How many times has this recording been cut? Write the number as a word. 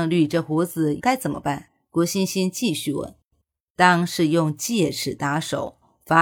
one